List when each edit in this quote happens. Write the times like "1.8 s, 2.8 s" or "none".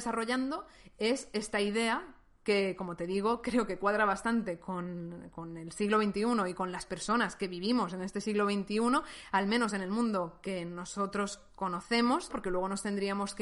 12.3 s